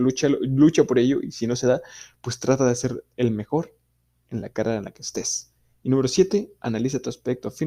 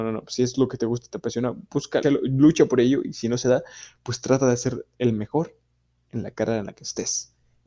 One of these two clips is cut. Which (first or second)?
second